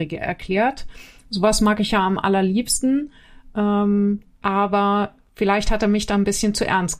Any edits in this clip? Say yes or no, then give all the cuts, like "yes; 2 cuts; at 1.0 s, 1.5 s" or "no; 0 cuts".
yes; 1 cut; at 4.3 s